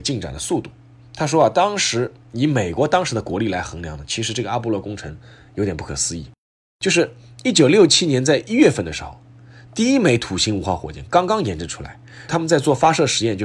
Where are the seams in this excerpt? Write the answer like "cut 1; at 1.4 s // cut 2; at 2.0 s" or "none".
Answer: cut 1; at 12.3 s